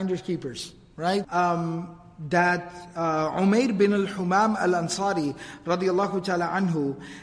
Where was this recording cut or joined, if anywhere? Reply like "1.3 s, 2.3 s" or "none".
1.2 s